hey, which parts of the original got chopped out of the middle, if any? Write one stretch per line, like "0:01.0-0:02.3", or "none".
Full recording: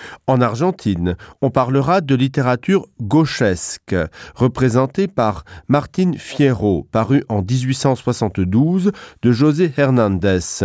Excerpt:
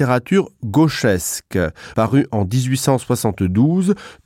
0:04.3-0:06.9